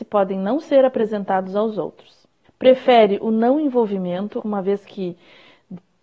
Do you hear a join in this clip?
yes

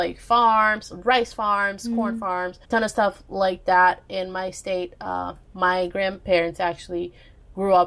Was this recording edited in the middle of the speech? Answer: yes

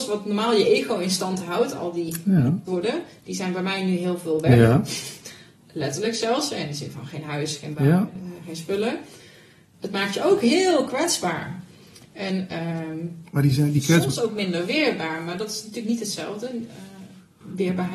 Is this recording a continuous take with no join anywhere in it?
no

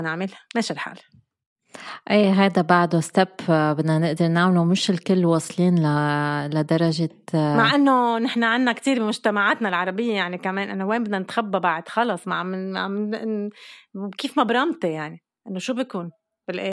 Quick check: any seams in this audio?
no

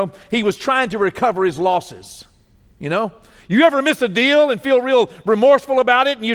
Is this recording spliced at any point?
no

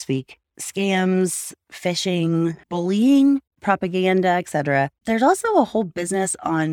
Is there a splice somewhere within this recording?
no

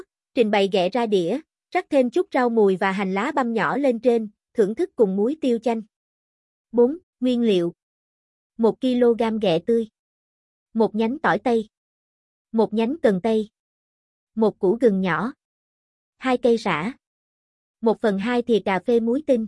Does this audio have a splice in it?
yes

